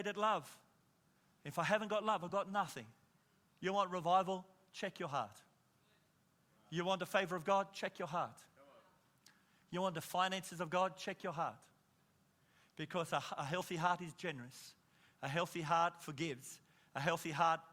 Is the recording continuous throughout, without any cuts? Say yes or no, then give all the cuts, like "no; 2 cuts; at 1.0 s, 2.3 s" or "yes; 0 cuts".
yes; 0 cuts